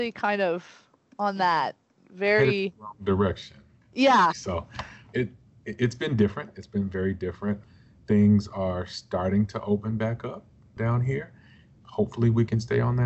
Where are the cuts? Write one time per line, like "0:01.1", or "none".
0:04.3